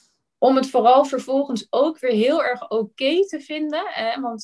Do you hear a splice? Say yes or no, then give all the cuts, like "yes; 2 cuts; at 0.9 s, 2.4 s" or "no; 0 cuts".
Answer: no; 0 cuts